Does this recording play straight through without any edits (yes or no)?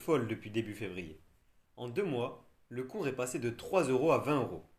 yes